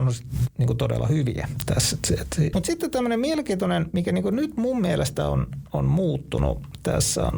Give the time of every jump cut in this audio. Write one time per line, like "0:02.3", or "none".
0:02.5